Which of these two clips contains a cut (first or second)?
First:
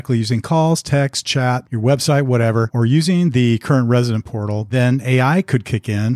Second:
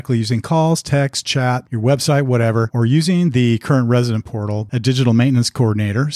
second